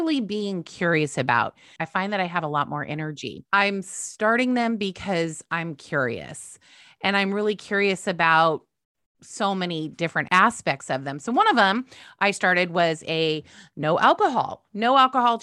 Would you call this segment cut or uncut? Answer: cut